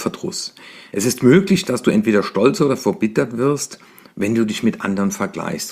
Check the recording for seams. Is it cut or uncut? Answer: uncut